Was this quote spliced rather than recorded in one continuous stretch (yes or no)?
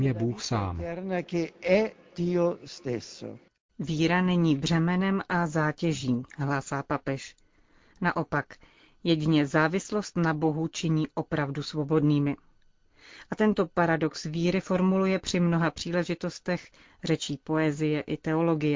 no